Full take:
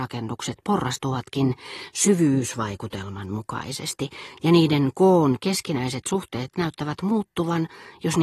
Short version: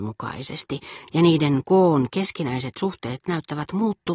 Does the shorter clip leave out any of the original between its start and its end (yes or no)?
no